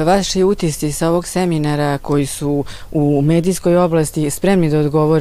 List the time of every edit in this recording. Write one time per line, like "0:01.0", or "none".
0:02.0